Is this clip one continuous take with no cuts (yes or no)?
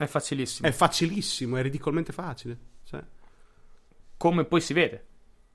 yes